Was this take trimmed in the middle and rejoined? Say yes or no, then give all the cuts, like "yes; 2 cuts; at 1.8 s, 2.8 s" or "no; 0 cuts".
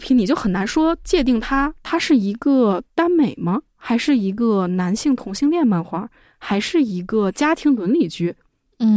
no; 0 cuts